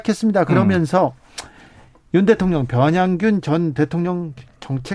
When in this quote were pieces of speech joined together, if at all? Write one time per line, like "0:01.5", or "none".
none